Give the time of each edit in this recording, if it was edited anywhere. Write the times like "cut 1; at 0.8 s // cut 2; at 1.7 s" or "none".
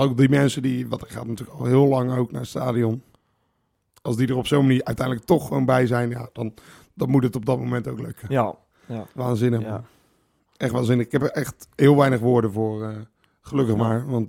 cut 1; at 9.1 s